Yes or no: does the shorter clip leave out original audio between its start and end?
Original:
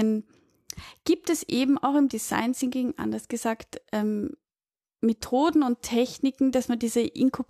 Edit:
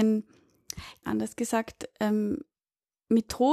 yes